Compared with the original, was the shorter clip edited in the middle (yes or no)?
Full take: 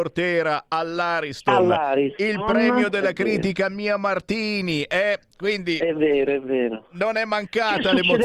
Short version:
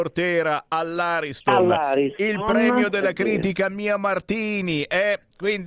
no